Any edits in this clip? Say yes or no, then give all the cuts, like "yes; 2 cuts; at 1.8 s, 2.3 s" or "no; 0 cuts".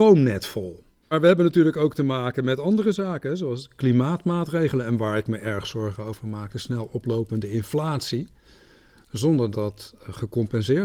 yes; 2 cuts; at 1.0 s, 9.5 s